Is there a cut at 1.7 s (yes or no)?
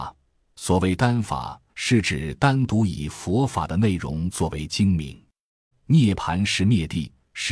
yes